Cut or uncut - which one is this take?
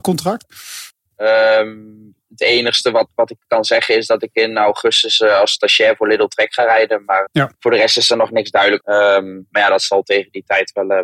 cut